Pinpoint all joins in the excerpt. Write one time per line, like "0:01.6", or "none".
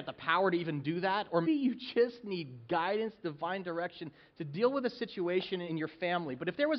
0:01.4
0:05.7